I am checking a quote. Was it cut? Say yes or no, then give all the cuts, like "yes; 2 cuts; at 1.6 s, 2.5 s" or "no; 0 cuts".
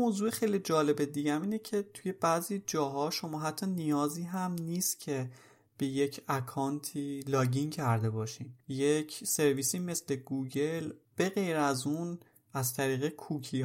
yes; 2 cuts; at 8.6 s, 11.0 s